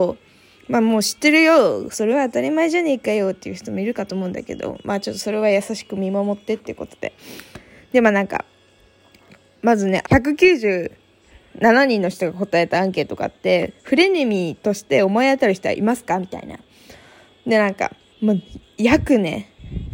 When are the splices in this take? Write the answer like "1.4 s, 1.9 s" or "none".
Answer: 10.0 s, 18.1 s